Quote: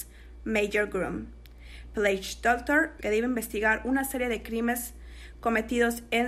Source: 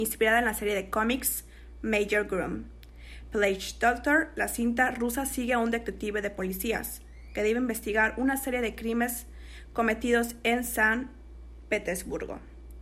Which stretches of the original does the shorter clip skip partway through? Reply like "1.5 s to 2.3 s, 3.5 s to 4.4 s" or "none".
4.3 s to 7.3 s